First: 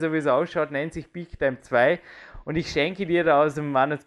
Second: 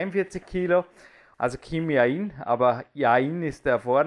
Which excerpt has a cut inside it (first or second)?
second